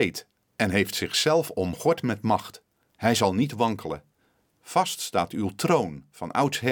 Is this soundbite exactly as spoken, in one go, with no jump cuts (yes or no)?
no